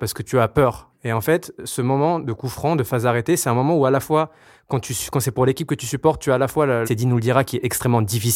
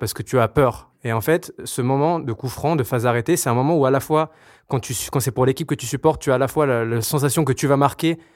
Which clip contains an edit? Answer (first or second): first